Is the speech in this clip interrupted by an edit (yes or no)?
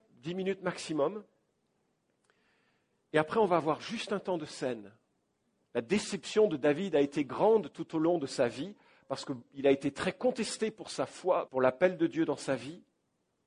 yes